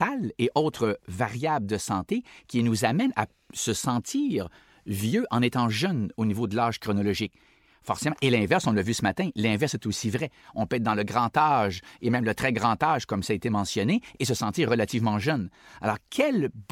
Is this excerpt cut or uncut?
uncut